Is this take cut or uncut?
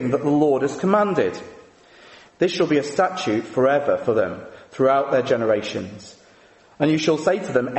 cut